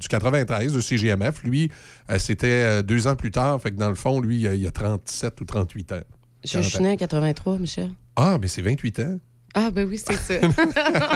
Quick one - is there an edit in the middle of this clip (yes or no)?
yes